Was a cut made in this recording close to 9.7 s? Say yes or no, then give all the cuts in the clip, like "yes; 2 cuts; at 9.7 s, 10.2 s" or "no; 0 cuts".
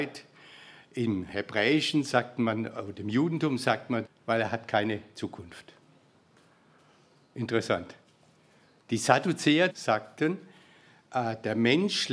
yes; 2 cuts; at 4.1 s, 9.7 s